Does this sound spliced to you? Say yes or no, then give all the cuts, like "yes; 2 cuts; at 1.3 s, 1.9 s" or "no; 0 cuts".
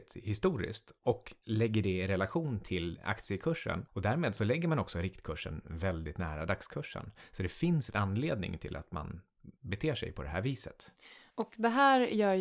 yes; 1 cut; at 3.9 s